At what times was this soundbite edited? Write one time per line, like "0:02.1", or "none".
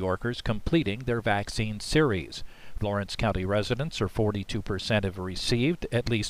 0:02.8